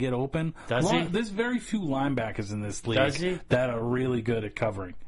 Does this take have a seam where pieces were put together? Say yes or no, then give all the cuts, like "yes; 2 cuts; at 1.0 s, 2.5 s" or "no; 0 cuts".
no; 0 cuts